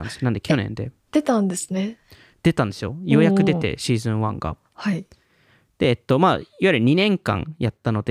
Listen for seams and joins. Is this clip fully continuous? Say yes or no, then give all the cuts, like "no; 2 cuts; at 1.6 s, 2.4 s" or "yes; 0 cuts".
yes; 0 cuts